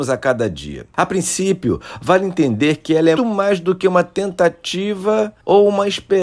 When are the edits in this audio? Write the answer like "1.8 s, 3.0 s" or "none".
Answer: 3.2 s

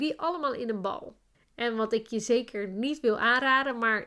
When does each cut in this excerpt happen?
1.3 s

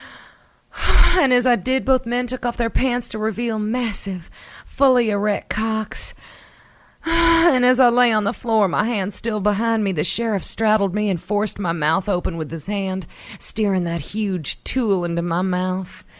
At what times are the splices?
none

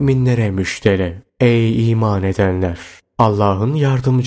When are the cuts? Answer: 1.3 s

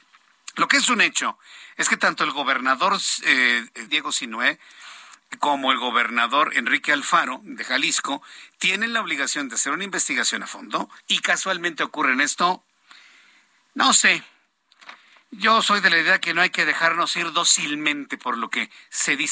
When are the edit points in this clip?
3.9 s, 11.0 s

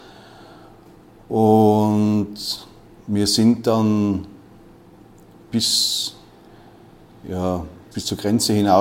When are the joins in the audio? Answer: 7.9 s

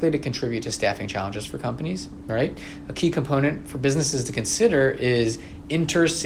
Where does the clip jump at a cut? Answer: none

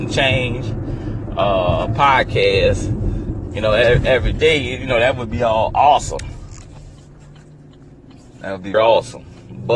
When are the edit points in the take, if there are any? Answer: 8.7 s

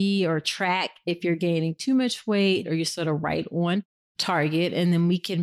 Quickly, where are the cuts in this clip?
2.6 s

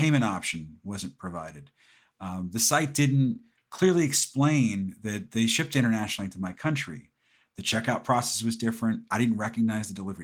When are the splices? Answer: none

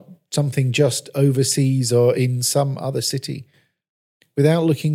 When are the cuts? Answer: none

